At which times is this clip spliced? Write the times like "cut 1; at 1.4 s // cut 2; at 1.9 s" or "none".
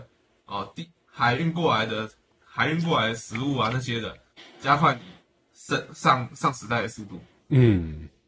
none